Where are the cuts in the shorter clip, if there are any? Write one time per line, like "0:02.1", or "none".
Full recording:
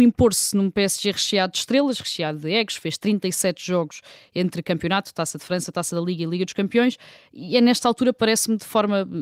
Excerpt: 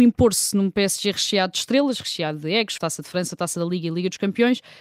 0:02.8

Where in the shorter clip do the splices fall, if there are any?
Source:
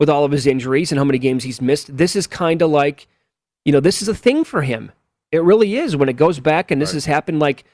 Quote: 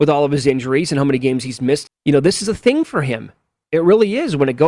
0:01.9

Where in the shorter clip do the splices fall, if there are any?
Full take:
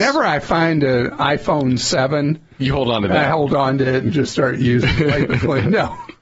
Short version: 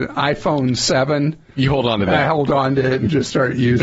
none

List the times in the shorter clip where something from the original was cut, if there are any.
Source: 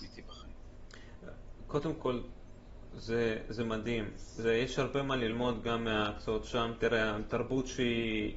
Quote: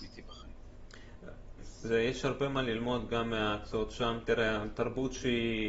0:01.6

